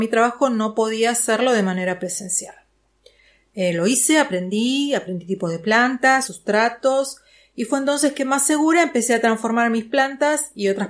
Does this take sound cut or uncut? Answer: cut